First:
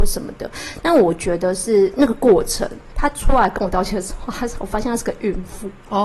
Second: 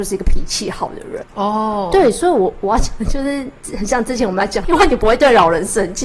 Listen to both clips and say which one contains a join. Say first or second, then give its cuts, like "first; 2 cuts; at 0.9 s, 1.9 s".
second; 2 cuts; at 1.2 s, 4.6 s